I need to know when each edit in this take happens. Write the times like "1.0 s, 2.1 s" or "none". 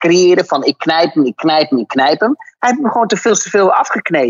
none